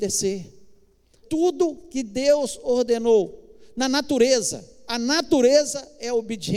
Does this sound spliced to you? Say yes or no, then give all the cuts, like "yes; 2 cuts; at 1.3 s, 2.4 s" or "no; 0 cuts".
yes; 1 cut; at 1.2 s